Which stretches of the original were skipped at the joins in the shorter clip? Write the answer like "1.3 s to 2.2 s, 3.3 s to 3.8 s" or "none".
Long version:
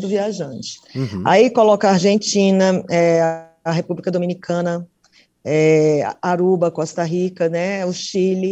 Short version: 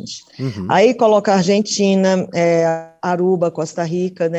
3.6 s to 6.2 s